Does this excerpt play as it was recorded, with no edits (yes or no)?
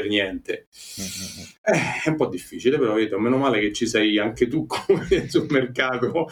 yes